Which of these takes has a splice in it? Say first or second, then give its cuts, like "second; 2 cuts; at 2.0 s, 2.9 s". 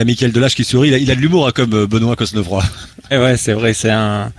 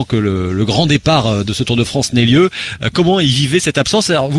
first; 1 cut; at 3.1 s